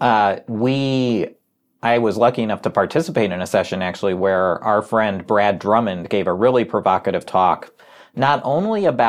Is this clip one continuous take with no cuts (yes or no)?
yes